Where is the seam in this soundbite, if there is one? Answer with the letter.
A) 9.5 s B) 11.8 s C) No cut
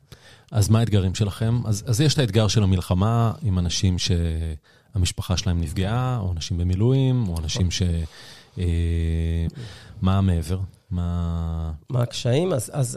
A